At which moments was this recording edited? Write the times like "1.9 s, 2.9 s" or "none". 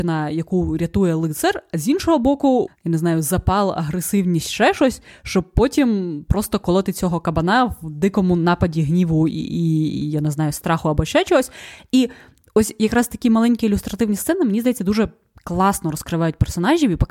2.7 s